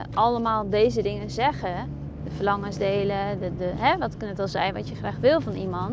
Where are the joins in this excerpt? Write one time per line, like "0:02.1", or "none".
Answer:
0:03.6